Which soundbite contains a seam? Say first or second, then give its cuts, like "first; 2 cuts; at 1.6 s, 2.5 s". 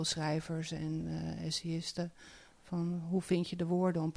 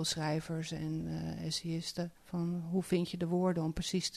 second; 1 cut; at 2.2 s